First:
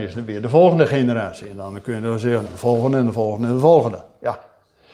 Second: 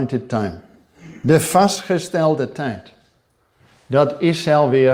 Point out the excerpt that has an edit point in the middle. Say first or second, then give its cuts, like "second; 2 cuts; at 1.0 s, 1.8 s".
first; 1 cut; at 2.5 s